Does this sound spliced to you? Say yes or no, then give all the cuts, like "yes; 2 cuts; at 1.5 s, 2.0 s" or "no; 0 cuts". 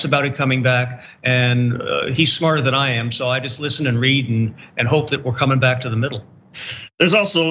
no; 0 cuts